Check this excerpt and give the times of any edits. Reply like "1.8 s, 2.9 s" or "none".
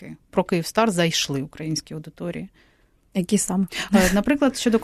none